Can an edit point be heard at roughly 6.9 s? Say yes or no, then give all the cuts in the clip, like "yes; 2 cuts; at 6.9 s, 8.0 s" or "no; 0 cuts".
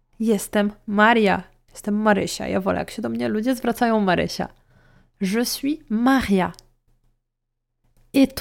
no; 0 cuts